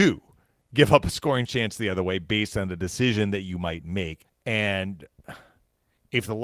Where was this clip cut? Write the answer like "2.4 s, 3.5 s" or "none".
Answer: 4.2 s

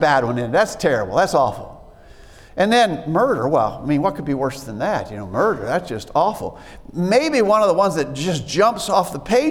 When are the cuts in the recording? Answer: none

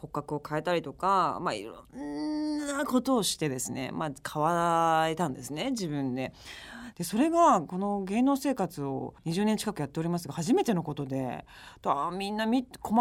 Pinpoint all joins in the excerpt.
6.9 s, 9.2 s

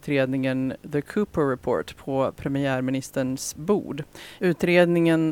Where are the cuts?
4.4 s

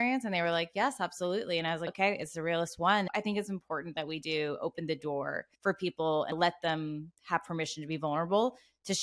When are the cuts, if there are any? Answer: 5.5 s

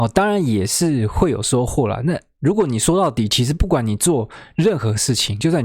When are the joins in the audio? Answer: none

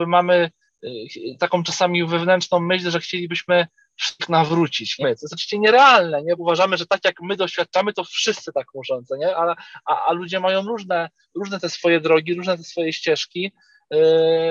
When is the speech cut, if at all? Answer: 5.0 s, 6.4 s

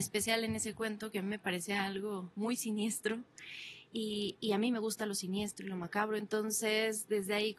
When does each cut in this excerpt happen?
none

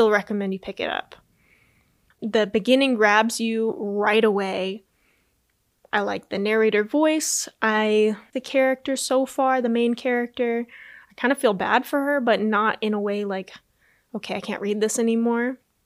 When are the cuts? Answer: 2.1 s, 8.3 s

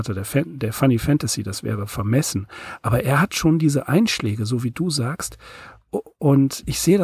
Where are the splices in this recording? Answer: none

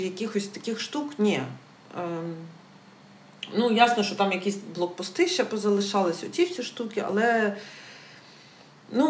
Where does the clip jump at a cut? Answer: none

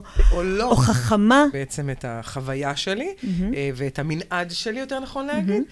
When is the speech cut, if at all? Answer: 1.5 s

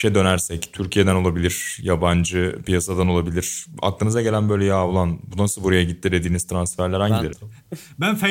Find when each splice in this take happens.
7.3 s

